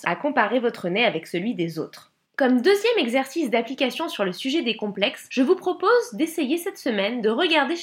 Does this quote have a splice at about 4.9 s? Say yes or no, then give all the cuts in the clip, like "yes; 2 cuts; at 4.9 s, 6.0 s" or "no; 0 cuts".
no; 1 cut; at 2.2 s